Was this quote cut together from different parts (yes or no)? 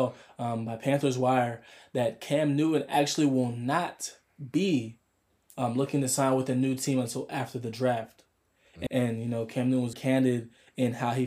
yes